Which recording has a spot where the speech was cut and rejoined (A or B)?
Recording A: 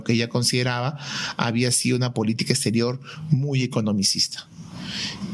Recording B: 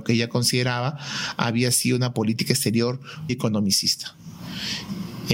B